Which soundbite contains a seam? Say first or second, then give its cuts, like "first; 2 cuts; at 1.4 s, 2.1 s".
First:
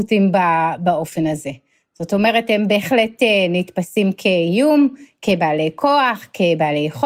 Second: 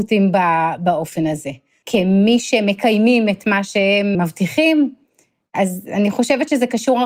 second; 2 cuts; at 1.8 s, 4.1 s